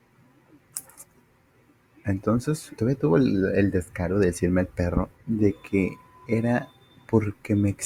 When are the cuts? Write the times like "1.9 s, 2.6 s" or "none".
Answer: 2.7 s, 5.1 s